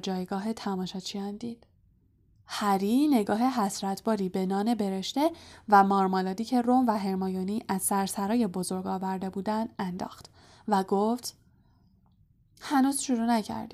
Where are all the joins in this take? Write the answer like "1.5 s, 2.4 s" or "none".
2.3 s